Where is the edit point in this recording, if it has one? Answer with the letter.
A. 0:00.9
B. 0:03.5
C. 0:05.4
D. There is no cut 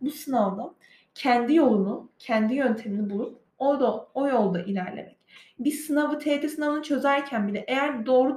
B